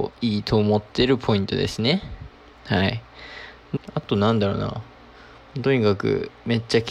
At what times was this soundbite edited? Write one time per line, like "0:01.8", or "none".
0:03.8